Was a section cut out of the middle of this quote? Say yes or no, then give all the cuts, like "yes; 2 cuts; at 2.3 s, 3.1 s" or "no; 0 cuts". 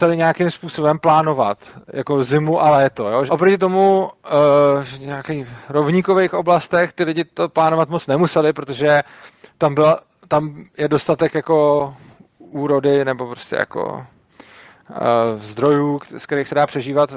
yes; 1 cut; at 3.3 s